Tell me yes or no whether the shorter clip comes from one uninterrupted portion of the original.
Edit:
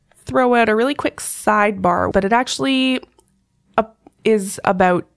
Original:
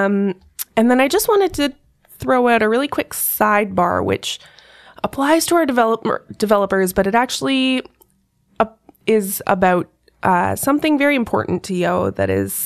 no